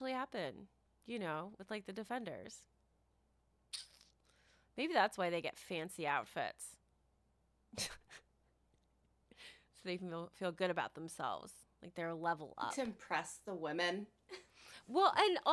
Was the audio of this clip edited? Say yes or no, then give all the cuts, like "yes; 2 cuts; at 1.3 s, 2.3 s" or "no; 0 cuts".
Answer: no; 0 cuts